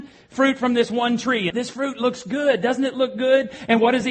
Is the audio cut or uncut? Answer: cut